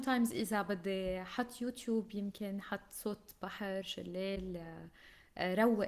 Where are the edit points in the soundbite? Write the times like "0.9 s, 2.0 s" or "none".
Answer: none